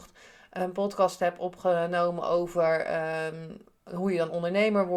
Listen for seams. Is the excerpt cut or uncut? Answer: uncut